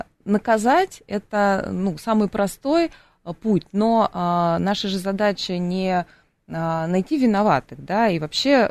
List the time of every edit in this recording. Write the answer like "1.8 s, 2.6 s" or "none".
none